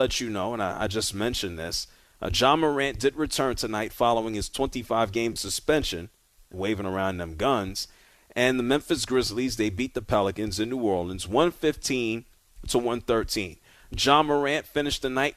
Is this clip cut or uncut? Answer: cut